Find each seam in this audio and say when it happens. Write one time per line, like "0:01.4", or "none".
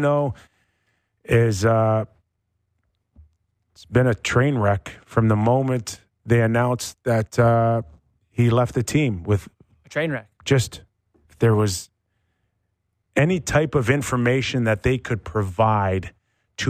0:10.4